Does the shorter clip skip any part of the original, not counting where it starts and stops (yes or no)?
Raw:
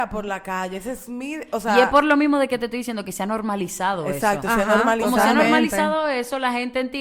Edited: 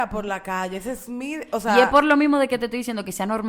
no